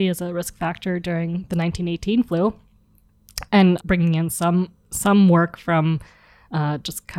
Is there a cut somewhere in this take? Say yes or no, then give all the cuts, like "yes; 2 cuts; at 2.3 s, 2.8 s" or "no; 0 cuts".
yes; 1 cut; at 3.8 s